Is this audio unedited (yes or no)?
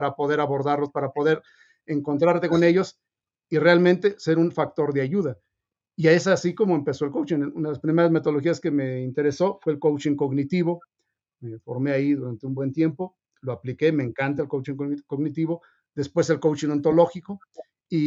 yes